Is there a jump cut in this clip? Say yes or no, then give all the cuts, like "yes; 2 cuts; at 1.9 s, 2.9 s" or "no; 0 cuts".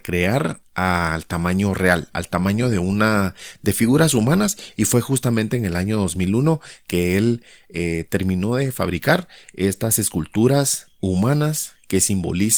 no; 0 cuts